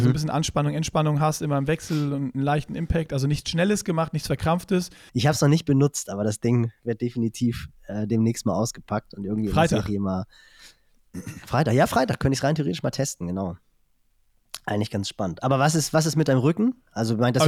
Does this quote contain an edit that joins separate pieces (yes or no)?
yes